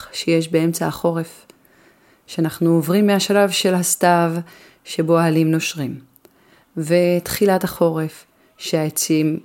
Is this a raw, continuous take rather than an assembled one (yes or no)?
yes